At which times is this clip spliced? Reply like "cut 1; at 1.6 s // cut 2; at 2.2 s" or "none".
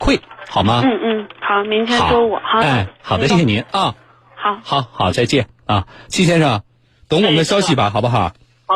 cut 1; at 3.3 s